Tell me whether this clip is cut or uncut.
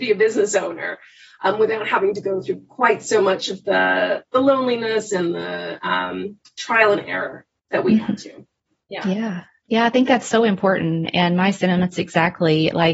uncut